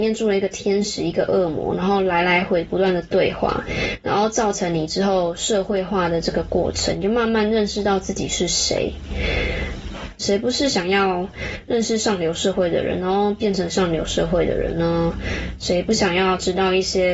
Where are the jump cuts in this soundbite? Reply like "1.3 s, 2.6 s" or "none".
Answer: 2.5 s, 10.2 s